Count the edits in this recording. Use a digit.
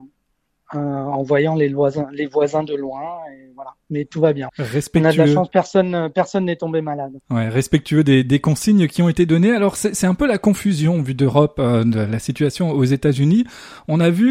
1